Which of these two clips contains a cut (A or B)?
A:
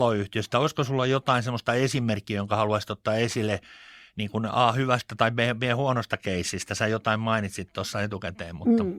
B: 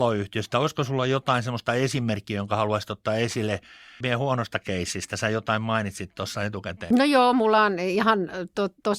B